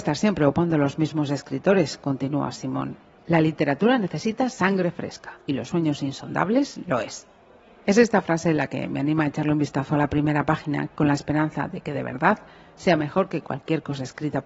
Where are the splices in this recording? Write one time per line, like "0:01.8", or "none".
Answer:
none

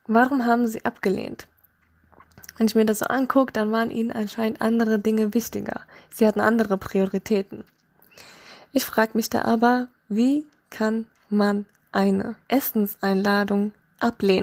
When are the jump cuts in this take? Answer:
0:12.4

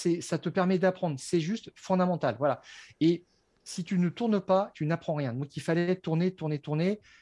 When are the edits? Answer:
0:04.7

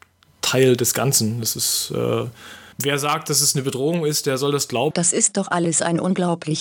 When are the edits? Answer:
0:02.7
0:04.9

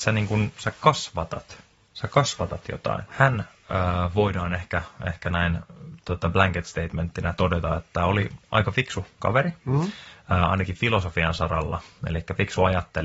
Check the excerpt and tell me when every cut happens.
0:03.1

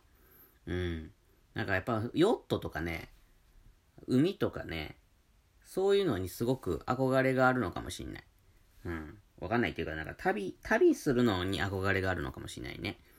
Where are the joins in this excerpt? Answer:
0:09.2

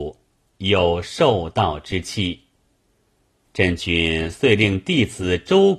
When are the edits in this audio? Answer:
none

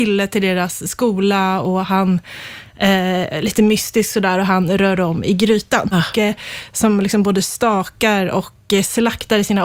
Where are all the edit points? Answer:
0:05.9

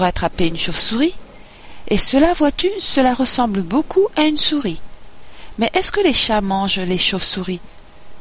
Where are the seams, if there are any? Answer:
none

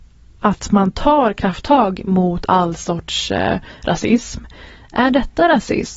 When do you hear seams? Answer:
none

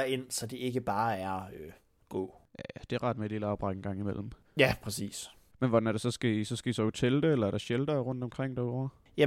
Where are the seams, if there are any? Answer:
none

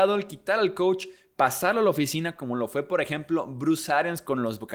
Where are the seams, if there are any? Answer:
none

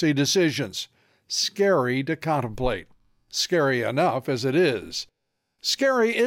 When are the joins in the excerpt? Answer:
none

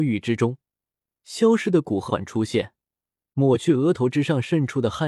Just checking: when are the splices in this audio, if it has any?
0:02.1

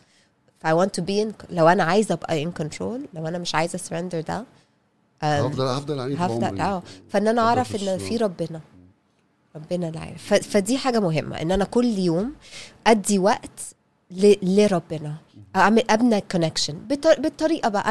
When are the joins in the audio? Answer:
none

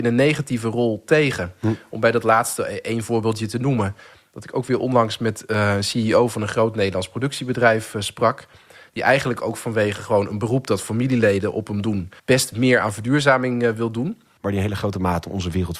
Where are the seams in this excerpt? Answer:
0:12.2
0:14.4

